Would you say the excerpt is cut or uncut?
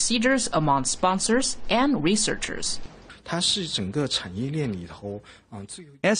cut